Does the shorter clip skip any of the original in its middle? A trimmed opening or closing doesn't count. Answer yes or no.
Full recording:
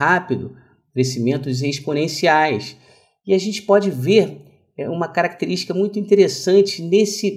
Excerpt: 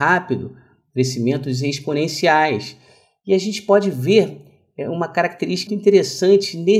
yes